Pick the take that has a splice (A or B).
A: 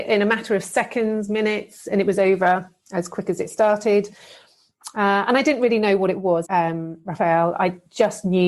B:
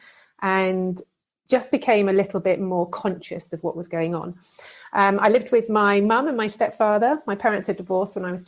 A